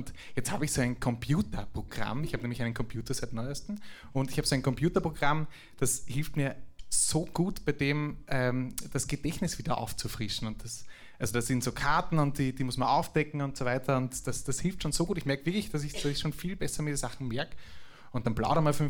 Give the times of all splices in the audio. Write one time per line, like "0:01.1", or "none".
none